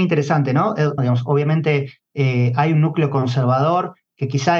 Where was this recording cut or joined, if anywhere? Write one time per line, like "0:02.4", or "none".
0:01.0